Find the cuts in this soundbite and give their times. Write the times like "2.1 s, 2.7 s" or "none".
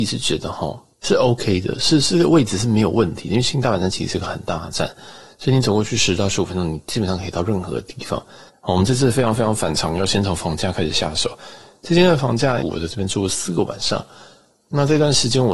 0.9 s, 8.5 s, 12.6 s